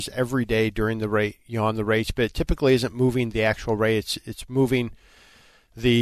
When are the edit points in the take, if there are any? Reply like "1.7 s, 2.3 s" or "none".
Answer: none